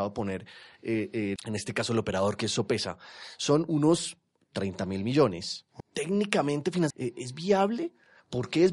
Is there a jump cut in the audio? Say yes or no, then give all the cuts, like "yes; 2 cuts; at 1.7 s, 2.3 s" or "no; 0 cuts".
yes; 3 cuts; at 1.4 s, 5.8 s, 6.9 s